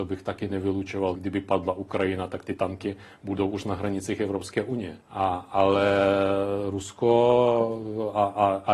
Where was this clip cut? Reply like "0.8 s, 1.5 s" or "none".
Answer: 1.2 s, 5.0 s